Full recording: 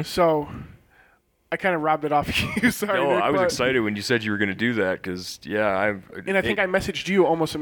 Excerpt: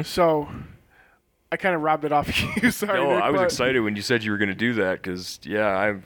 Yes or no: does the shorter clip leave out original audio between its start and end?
no